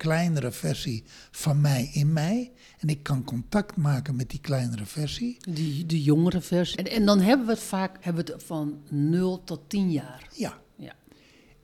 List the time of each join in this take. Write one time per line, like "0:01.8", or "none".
0:06.7
0:08.0